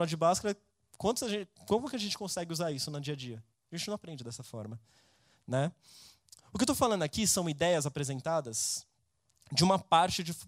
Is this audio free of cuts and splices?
yes; 0 cuts

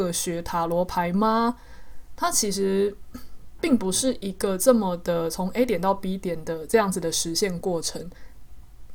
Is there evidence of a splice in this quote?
no; 0 cuts

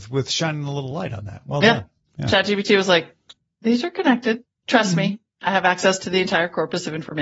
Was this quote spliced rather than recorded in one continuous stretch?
no; 0 cuts

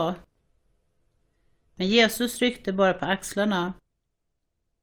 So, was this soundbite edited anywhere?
no; 0 cuts

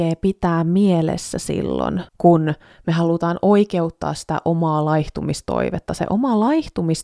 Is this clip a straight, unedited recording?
no; 1 cut; at 2.1 s

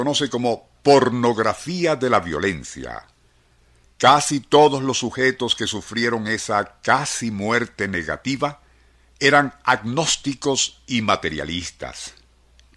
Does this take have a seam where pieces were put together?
yes; 1 cut; at 3.8 s

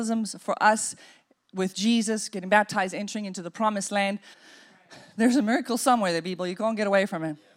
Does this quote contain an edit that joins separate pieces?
yes; 1 cut; at 4.3 s

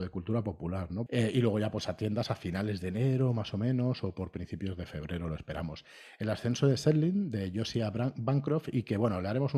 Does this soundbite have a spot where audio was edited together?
yes; 1 cut; at 1.1 s

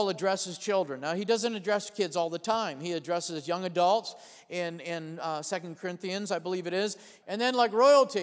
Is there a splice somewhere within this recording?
yes; 1 cut; at 7.2 s

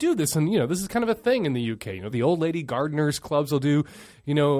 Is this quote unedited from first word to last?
no; 1 cut; at 2.1 s

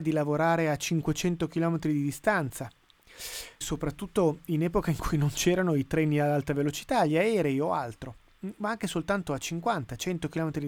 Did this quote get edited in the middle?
yes; 1 cut; at 3.6 s

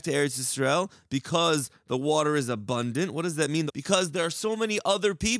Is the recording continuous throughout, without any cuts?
no; 1 cut; at 3.7 s

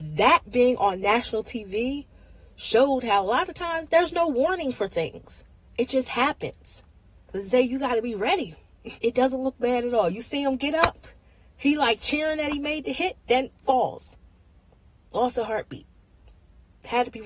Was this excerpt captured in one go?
no; 2 cuts; at 9.0 s, 13.6 s

